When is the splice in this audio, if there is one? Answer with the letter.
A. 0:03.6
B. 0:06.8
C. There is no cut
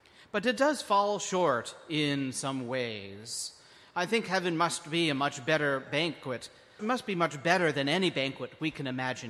B